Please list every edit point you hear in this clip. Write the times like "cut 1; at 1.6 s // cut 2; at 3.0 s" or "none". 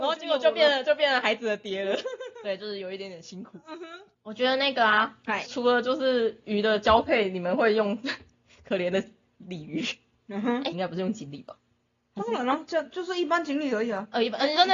cut 1; at 5.5 s // cut 2; at 10.7 s